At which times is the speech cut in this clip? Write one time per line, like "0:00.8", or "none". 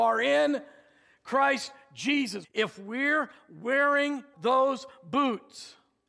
0:02.4
0:04.3